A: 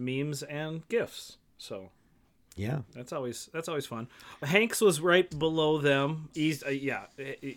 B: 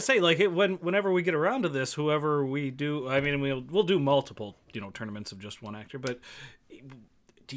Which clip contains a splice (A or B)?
A